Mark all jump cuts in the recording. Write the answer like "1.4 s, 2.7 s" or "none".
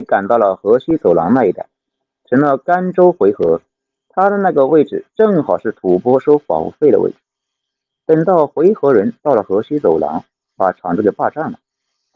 none